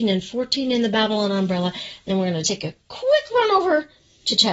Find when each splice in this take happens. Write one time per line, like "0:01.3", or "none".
0:02.4

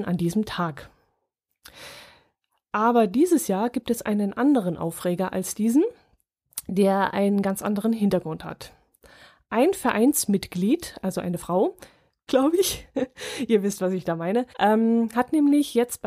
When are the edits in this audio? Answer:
0:12.3
0:14.5

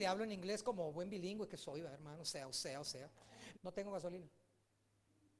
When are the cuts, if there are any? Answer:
0:03.5

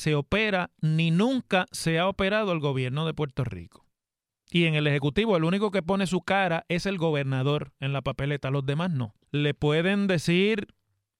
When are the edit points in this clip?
0:04.3
0:09.2

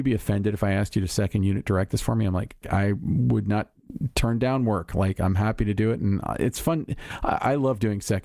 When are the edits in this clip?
0:02.6

